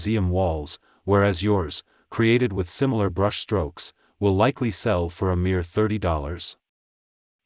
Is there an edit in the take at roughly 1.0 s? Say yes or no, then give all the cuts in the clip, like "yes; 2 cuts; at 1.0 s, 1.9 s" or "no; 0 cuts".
yes; 1 cut; at 1.0 s